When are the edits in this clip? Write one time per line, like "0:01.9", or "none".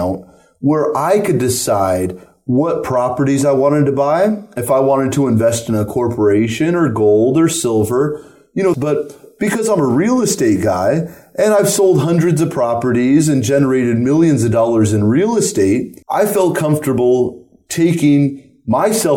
0:08.7
0:16.0

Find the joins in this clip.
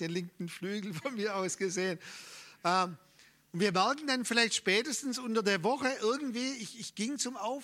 none

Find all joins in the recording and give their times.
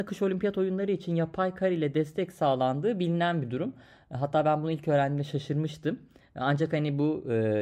none

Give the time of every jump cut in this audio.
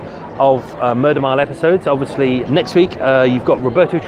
0:02.5

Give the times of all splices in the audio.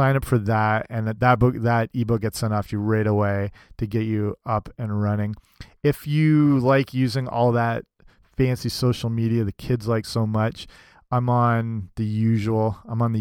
none

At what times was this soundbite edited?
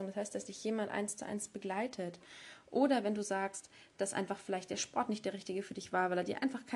none

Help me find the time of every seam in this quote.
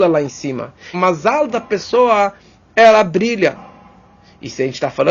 0:00.9

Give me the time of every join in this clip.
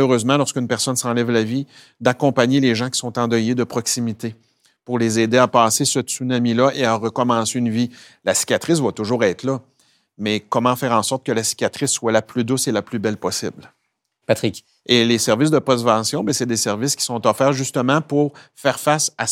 0:14.8

